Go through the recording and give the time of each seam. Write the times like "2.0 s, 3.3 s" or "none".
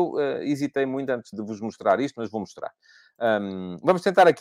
1.3 s